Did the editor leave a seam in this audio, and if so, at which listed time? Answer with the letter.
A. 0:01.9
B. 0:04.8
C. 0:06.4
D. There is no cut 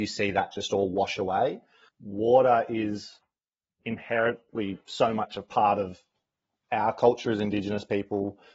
A